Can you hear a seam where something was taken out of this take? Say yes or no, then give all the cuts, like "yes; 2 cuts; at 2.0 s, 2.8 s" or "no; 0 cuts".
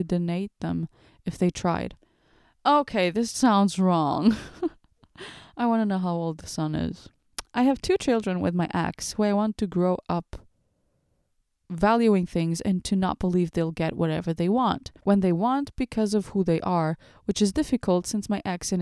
yes; 2 cuts; at 3.3 s, 15.0 s